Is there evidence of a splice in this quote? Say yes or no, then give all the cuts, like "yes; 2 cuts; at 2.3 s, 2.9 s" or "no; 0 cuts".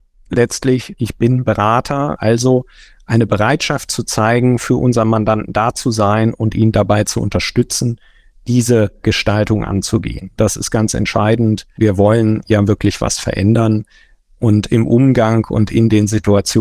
yes; 1 cut; at 10.4 s